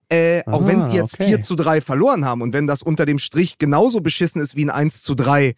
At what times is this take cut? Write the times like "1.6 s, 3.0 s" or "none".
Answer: none